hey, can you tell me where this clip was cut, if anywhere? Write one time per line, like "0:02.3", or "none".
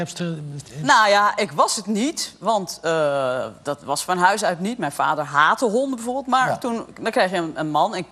none